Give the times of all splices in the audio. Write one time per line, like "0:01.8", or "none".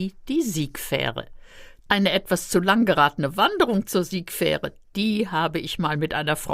0:01.9